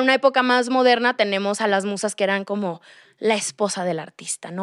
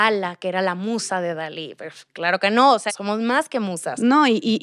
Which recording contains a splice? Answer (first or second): second